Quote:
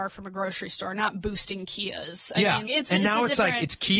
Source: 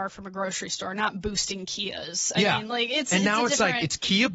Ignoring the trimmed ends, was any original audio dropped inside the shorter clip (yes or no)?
yes